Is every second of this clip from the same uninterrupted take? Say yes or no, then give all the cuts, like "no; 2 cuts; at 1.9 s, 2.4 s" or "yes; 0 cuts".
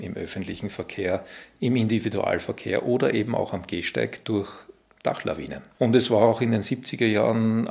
no; 1 cut; at 5.7 s